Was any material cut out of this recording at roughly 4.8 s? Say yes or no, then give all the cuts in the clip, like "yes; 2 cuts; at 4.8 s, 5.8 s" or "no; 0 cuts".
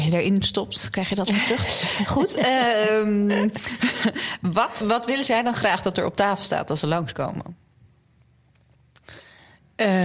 yes; 1 cut; at 4.8 s